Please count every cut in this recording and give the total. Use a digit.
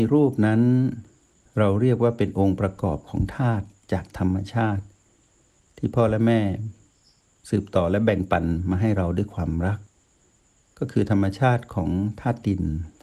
0